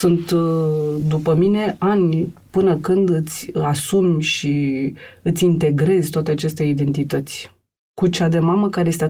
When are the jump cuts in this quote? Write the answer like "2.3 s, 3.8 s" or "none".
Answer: none